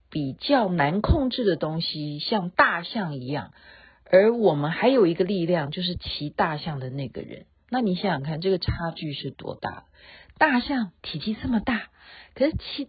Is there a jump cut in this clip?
no; 0 cuts

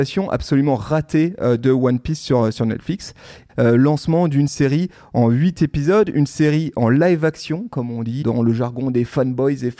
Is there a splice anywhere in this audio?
yes; 2 cuts; at 3.5 s, 8.2 s

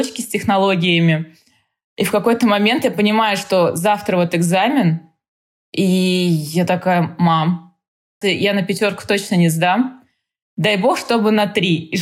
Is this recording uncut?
no; 1 cut; at 8.2 s

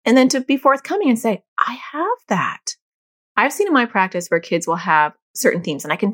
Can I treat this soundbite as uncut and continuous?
yes; 0 cuts

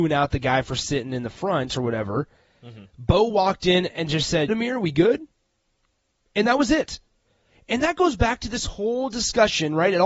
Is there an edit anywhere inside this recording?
yes; 1 cut; at 4.5 s

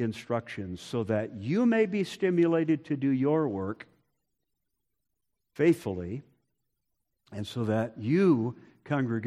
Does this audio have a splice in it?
no; 0 cuts

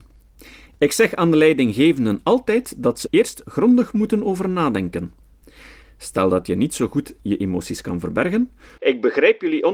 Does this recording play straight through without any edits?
no; 3 cuts; at 3.1 s, 5.8 s, 8.8 s

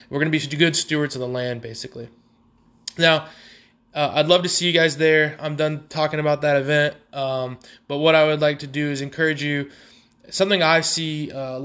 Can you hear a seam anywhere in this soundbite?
no; 0 cuts

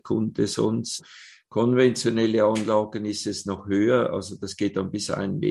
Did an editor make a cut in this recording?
no; 0 cuts

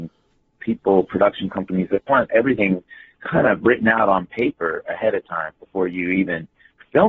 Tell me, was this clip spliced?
no; 0 cuts

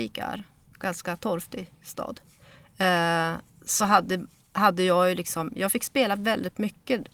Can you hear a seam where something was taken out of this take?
no; 0 cuts

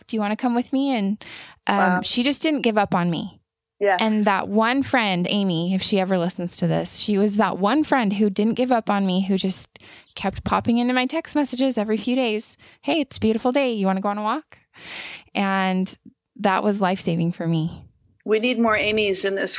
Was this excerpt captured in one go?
yes; 0 cuts

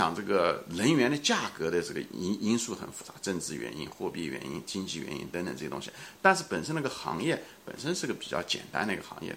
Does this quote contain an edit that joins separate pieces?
no; 0 cuts

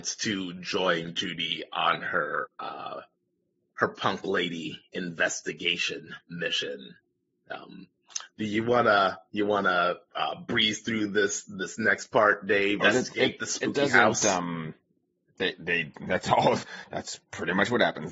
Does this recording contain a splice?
yes; 1 cut; at 12.8 s

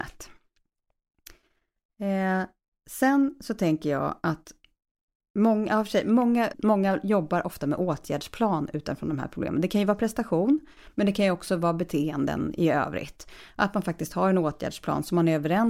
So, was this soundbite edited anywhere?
yes; 1 cut; at 6.5 s

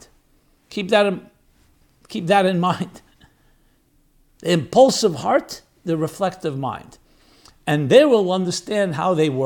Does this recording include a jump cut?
no; 0 cuts

